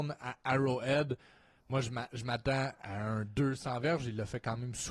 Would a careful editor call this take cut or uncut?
uncut